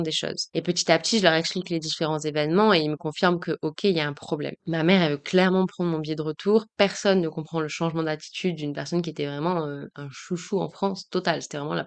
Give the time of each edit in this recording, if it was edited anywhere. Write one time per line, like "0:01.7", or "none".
none